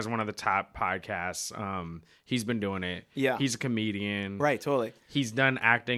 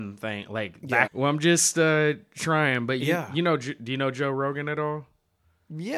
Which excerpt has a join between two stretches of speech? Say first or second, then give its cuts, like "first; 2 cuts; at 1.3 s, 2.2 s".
second; 1 cut; at 1.1 s